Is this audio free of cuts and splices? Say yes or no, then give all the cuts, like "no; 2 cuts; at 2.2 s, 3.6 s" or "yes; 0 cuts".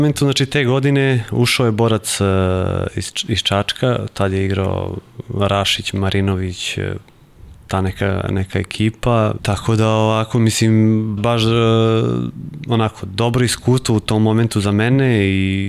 no; 2 cuts; at 9.4 s, 11.2 s